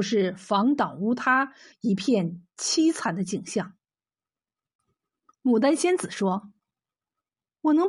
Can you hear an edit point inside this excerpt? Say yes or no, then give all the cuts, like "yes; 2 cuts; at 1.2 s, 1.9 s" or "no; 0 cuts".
yes; 2 cuts; at 1.7 s, 4.8 s